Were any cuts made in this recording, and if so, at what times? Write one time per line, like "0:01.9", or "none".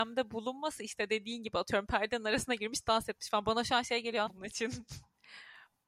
0:04.3